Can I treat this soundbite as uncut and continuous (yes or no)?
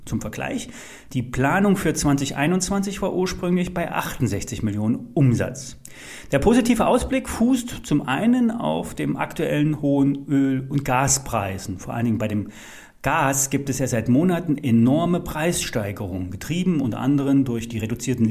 yes